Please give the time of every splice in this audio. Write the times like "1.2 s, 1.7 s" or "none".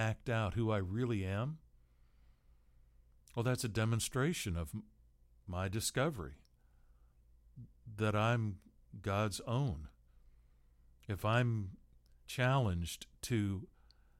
11.0 s

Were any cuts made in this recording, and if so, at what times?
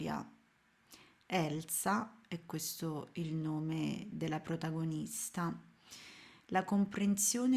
6.4 s

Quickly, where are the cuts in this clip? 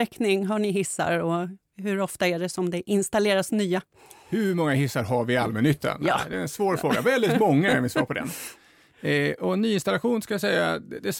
none

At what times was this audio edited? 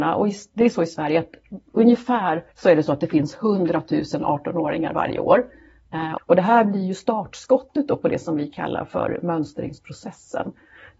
2.5 s, 6.2 s

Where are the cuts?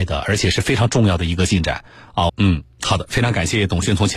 2.3 s

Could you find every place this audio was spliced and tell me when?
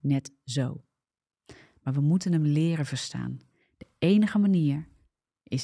none

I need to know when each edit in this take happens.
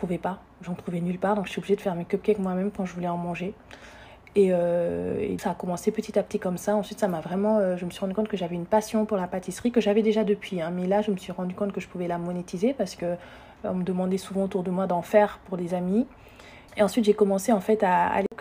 5.4 s, 16.7 s

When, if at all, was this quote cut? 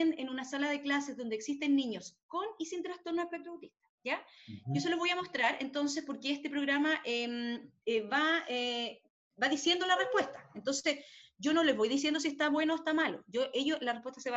none

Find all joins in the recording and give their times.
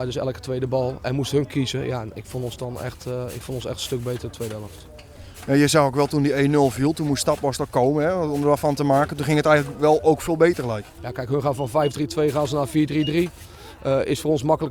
none

